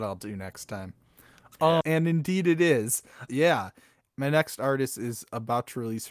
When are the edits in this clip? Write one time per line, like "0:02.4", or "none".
0:01.8
0:03.3